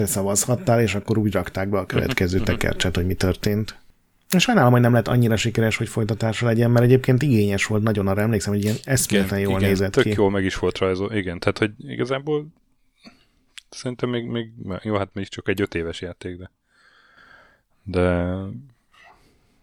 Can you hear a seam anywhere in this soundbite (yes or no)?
no